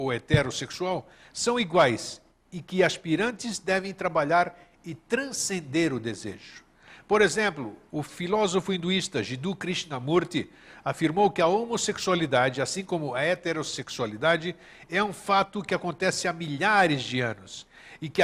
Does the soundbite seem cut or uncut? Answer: cut